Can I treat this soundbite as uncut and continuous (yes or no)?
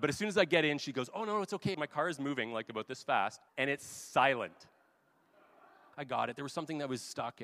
no